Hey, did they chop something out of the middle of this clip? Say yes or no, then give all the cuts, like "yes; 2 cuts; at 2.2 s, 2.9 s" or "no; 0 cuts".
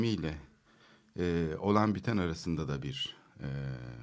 no; 0 cuts